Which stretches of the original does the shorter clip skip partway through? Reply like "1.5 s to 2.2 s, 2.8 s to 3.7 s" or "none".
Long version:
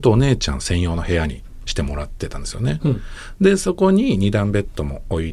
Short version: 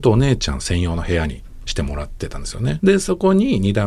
2.8 s to 3.4 s